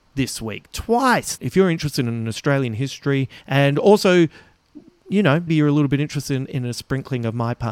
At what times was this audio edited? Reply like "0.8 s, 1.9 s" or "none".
1.4 s, 3.4 s, 5.5 s

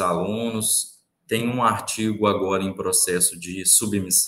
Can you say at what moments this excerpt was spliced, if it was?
none

